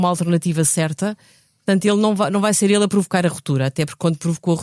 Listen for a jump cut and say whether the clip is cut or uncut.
uncut